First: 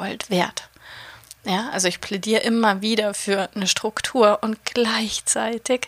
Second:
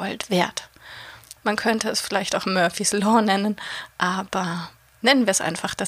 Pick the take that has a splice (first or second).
second